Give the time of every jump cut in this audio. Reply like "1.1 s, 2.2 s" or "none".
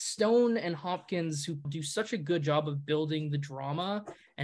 1.6 s